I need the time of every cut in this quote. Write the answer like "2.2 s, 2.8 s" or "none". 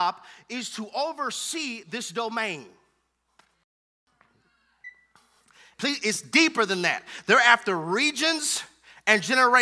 5.7 s

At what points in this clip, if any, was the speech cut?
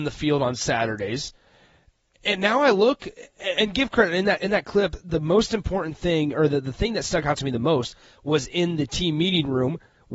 none

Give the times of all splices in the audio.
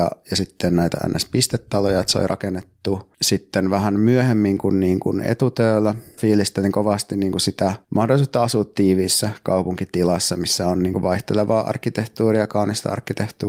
6.2 s, 7.8 s

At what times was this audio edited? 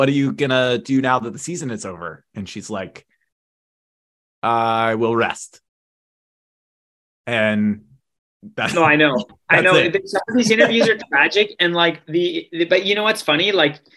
none

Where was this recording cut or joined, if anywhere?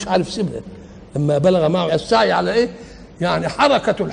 1.9 s

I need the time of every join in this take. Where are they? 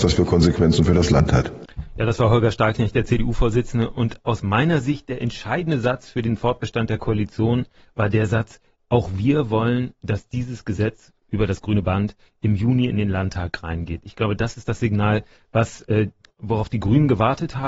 none

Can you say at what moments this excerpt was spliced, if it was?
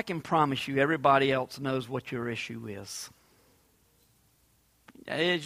none

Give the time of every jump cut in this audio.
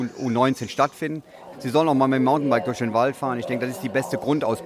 1.5 s

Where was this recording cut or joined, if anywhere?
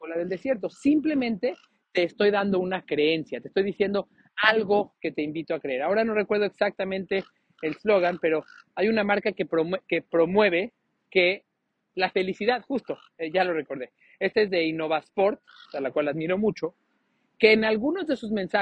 15.6 s

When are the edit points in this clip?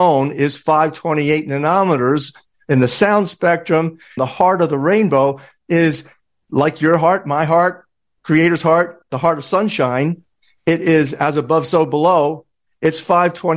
4.2 s

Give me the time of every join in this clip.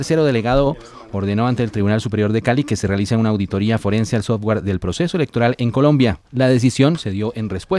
6.3 s

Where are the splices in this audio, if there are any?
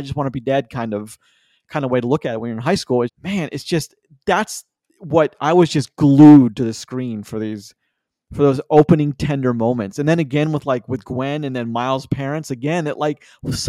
3.1 s

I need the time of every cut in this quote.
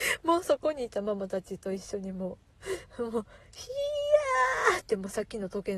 none

